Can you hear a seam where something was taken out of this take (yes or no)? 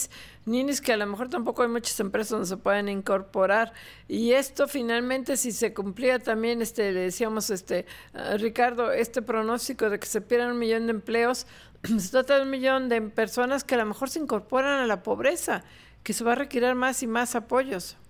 no